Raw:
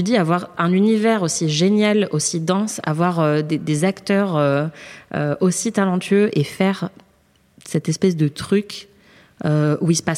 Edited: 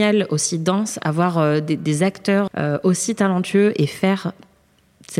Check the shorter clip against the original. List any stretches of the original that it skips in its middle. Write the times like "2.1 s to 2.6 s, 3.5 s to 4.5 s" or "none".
4.3 s to 5.0 s